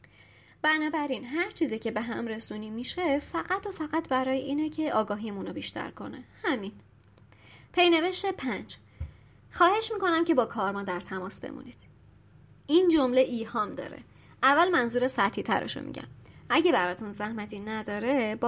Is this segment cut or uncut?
uncut